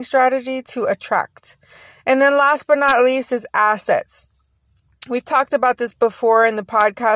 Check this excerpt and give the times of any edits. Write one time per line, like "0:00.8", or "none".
none